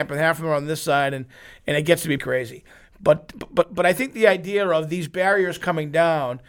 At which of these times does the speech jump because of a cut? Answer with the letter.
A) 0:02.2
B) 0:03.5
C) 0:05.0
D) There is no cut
A